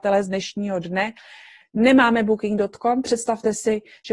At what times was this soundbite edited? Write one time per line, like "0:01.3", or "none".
0:01.6